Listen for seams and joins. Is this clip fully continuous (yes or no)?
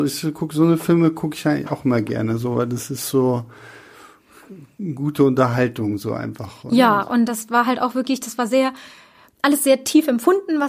yes